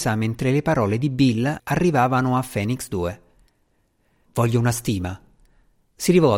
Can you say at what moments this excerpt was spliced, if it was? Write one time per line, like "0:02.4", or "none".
0:01.6
0:04.3